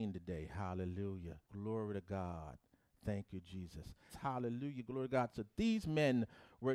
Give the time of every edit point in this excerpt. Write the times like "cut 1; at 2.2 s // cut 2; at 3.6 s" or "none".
cut 1; at 1.4 s // cut 2; at 4.1 s